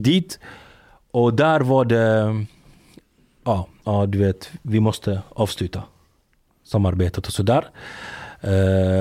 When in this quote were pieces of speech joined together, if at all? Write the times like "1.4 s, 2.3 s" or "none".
3.8 s